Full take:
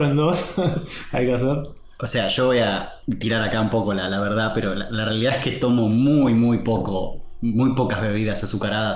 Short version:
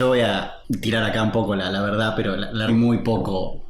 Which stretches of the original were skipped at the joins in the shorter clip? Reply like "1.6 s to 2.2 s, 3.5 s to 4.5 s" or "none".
5.1 s to 6.3 s